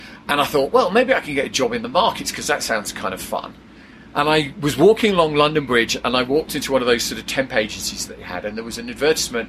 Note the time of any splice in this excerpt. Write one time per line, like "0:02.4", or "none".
none